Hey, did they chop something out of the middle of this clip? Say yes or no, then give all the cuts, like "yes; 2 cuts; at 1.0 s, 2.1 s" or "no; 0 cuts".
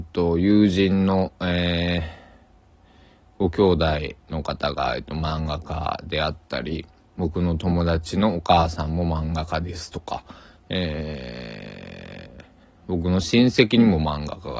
no; 0 cuts